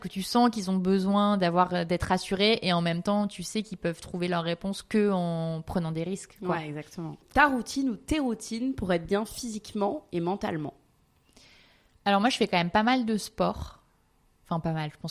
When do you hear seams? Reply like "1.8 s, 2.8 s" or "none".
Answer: none